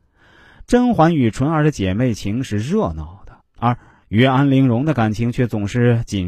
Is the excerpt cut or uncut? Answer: cut